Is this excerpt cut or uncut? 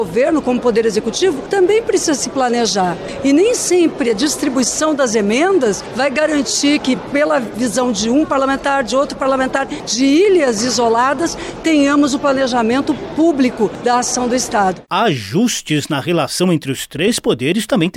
uncut